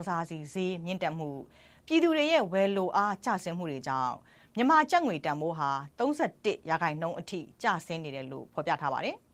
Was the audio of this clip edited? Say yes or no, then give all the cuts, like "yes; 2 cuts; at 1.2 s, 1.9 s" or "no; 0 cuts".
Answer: no; 0 cuts